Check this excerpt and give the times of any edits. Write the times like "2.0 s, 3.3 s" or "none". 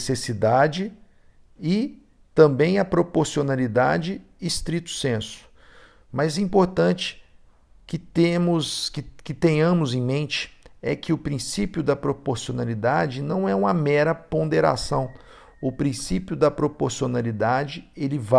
none